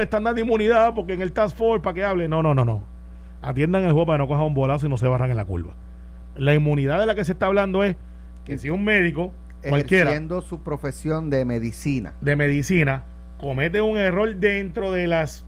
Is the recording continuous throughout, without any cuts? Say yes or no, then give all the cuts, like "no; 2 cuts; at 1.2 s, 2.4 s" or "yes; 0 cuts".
yes; 0 cuts